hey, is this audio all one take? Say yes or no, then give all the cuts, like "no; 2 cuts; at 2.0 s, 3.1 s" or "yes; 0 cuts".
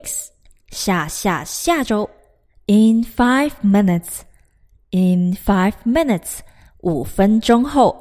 yes; 0 cuts